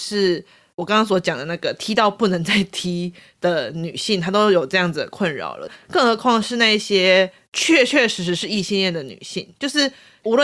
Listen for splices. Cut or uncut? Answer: uncut